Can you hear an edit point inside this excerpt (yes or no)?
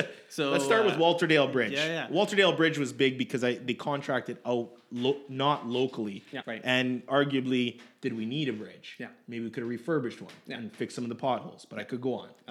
yes